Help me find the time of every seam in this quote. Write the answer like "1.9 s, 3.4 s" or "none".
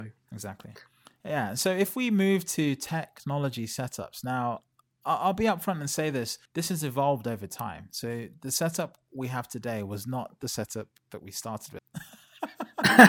6.5 s, 11.8 s